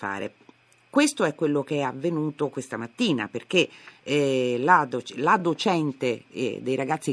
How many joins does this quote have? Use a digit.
0